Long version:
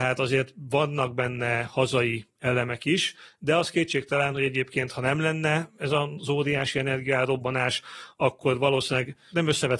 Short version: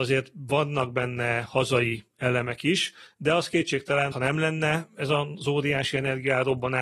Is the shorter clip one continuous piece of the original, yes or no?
no